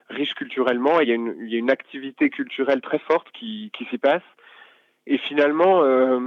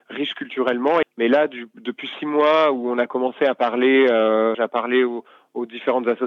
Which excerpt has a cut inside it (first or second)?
second